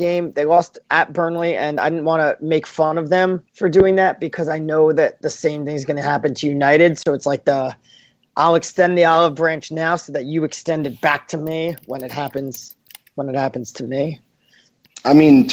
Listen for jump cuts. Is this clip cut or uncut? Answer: cut